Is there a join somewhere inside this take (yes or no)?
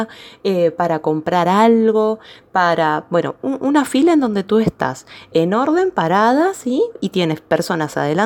no